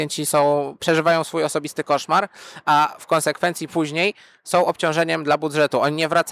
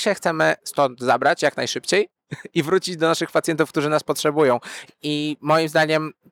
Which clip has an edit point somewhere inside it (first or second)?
second